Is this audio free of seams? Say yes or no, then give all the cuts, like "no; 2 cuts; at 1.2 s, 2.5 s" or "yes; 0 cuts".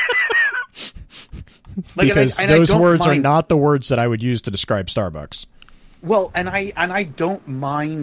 yes; 0 cuts